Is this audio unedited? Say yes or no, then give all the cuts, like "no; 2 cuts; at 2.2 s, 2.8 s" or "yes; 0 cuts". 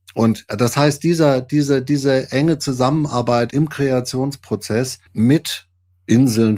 no; 2 cuts; at 3.5 s, 5.1 s